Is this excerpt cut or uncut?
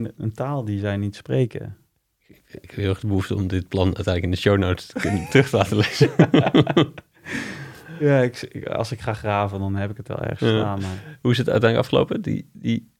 uncut